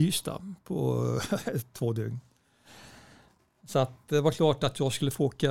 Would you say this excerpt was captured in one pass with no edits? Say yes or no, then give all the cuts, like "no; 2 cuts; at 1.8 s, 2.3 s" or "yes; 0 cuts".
yes; 0 cuts